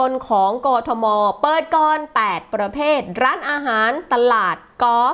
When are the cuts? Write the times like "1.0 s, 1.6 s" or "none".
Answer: none